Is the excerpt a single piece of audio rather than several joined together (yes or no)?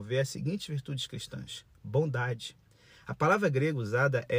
yes